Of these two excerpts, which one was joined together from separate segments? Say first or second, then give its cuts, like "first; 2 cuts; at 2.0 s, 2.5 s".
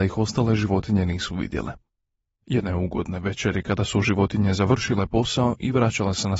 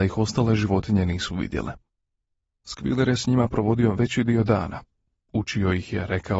first; 1 cut; at 2.3 s